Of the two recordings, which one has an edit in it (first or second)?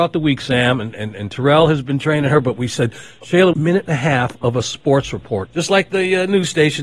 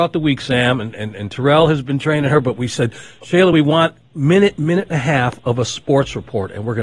first